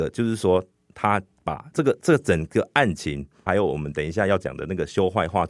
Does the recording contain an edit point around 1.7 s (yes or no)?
yes